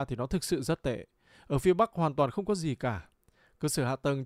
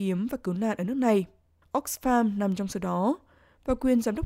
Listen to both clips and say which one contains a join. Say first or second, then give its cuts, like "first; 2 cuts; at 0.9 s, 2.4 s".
second; 1 cut; at 1.6 s